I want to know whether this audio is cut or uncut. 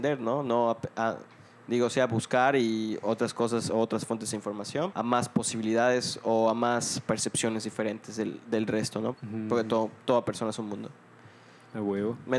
cut